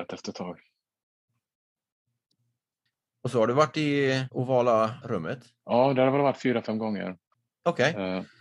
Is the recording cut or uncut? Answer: uncut